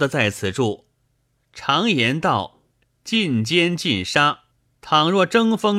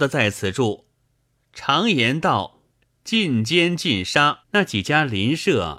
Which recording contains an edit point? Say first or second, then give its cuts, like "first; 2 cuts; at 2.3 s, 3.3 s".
second; 1 cut; at 4.4 s